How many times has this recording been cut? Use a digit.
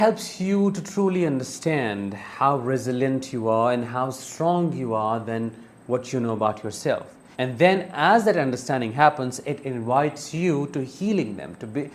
1